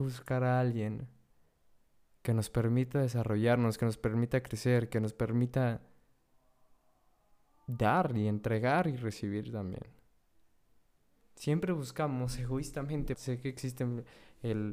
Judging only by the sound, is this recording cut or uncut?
cut